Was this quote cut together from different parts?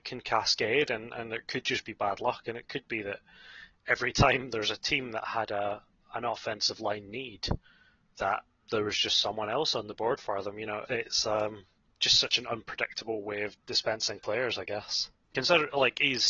yes; 2 cuts; at 10.9 s, 15.3 s

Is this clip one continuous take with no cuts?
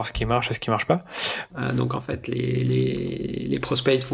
no; 1 cut; at 1.5 s

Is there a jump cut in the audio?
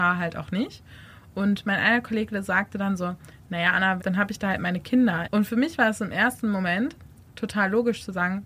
yes; 2 cuts; at 4.0 s, 5.2 s

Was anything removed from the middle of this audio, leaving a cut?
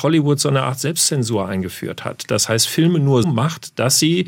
yes; 1 cut; at 3.2 s

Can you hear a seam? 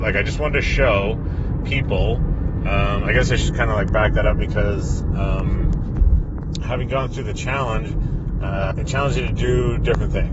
yes; 1 cut; at 8.7 s

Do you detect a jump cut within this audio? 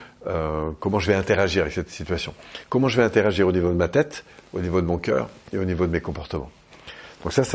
no; 0 cuts

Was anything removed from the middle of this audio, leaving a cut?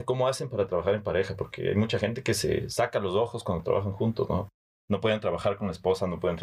no; 0 cuts

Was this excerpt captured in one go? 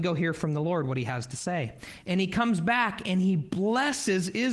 yes; 0 cuts

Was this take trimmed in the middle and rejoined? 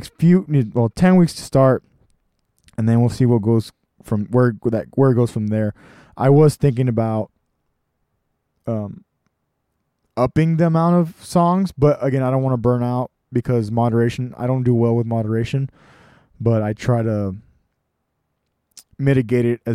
no; 0 cuts

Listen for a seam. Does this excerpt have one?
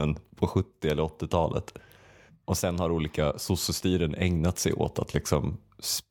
no; 0 cuts

